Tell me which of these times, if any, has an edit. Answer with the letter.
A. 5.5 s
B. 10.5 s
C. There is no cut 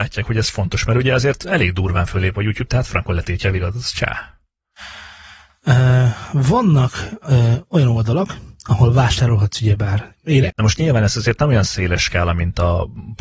B